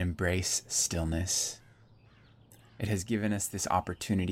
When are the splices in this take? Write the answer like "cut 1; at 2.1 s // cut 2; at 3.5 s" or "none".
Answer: none